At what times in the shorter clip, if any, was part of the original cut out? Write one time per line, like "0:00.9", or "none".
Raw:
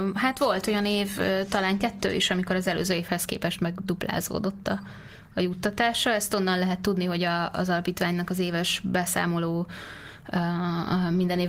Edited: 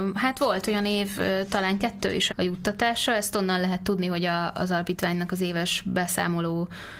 0:02.3